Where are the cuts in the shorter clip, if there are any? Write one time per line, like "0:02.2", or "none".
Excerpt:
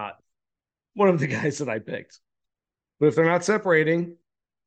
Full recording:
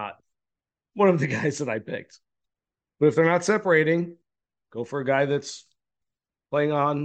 none